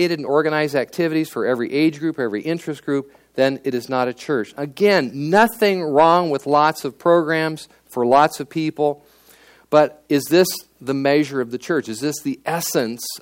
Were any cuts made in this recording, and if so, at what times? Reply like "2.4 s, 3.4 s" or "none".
none